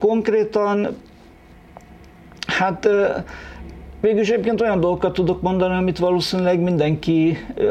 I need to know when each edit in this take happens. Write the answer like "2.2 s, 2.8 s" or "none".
none